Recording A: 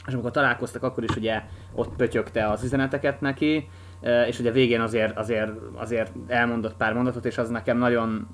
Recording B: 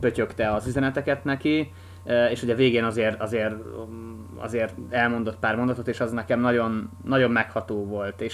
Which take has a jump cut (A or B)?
A